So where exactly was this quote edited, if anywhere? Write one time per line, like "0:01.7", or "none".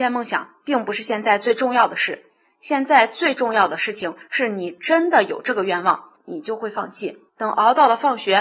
0:06.2
0:07.3